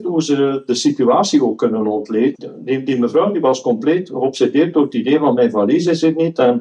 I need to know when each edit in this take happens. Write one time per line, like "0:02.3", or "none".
0:02.3